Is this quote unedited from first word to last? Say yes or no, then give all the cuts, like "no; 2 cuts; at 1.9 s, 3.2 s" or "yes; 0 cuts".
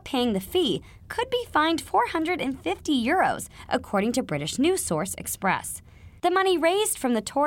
no; 1 cut; at 6.2 s